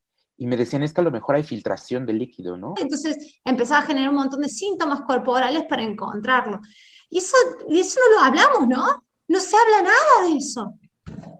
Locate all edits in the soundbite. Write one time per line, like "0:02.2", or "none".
0:02.8